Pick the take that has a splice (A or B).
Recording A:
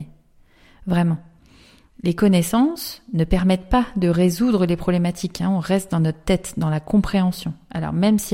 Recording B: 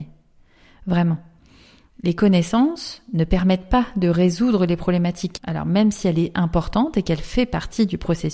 B